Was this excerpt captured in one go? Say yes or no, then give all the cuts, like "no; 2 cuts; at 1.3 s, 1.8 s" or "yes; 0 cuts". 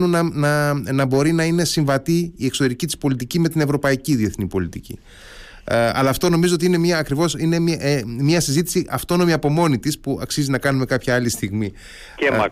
yes; 0 cuts